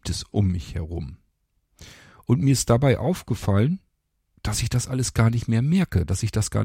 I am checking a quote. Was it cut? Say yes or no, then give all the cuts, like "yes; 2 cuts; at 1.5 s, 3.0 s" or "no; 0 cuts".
no; 0 cuts